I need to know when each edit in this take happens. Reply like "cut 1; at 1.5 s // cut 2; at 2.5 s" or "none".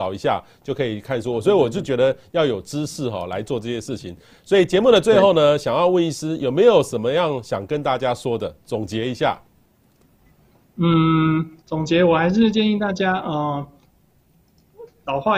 cut 1; at 11.6 s